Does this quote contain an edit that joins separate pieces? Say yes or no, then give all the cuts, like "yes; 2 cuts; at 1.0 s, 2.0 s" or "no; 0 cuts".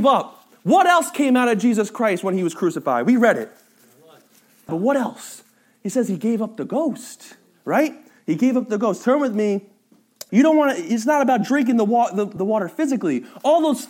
yes; 3 cuts; at 4.7 s, 10.3 s, 12.4 s